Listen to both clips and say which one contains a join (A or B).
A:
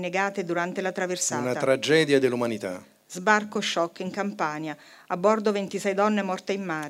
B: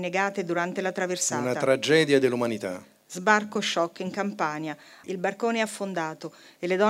B